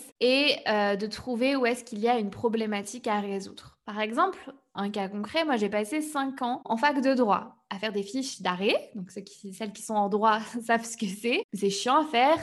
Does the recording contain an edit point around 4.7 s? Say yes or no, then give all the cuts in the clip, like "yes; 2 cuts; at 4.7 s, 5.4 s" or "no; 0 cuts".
yes; 1 cut; at 4.7 s